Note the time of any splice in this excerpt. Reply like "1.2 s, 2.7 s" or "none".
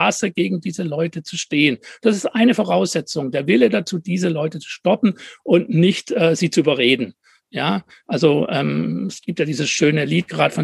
none